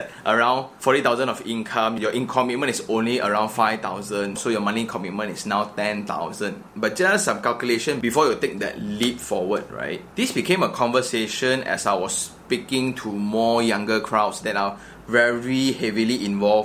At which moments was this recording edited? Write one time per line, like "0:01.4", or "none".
0:04.4